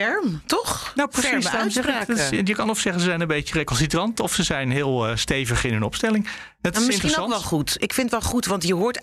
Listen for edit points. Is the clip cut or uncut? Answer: uncut